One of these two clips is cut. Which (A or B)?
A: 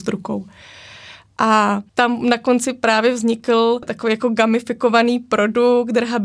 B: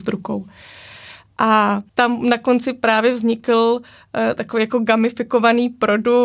A